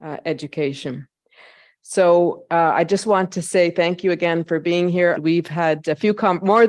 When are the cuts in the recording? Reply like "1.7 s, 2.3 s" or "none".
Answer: 5.2 s